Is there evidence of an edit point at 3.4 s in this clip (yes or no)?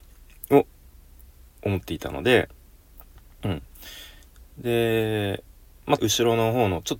no